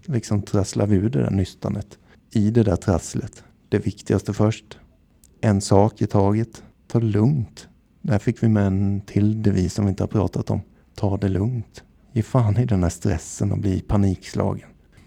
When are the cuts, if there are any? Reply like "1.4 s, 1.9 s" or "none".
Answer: 2.1 s

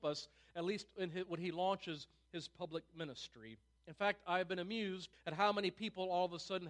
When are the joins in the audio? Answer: 3.8 s, 5.1 s

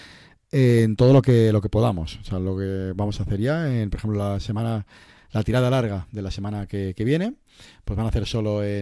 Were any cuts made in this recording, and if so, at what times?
none

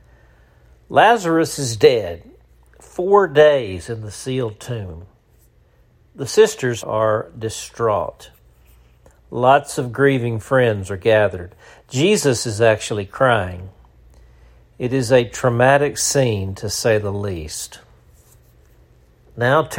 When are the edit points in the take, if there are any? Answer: 6.8 s

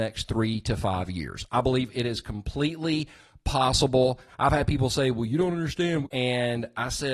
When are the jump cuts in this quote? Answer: 4.3 s, 6.0 s

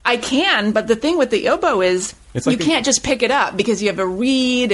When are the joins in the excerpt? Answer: 2.2 s

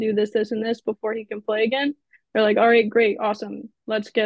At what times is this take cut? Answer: none

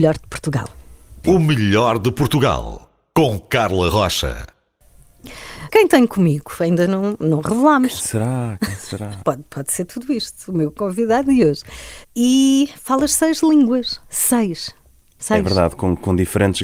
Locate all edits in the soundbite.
5.7 s, 9.2 s, 12.0 s

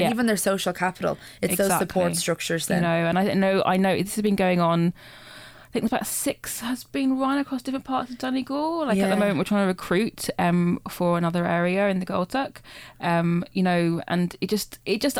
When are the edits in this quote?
none

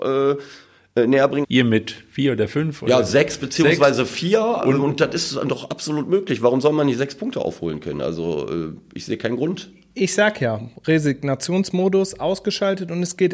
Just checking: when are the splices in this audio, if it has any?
1.4 s

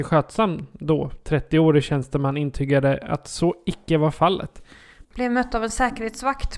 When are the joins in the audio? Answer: 5.0 s

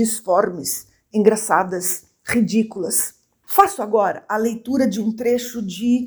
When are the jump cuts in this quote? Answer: none

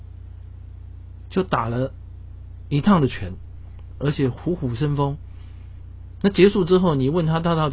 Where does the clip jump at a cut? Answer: 3.9 s

